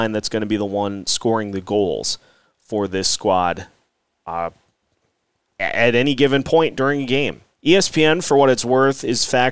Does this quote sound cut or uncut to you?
cut